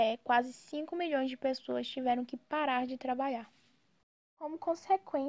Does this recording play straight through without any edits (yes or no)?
yes